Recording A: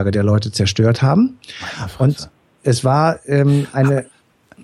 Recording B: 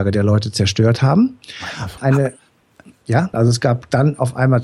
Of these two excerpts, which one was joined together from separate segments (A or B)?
B